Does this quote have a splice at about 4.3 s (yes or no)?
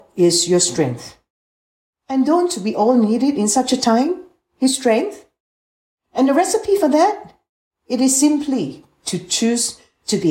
no